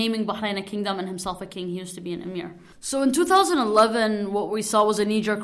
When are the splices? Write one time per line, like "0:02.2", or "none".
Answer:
0:02.7